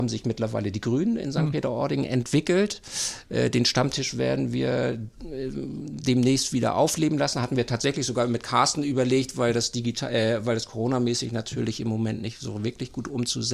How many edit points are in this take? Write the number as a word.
zero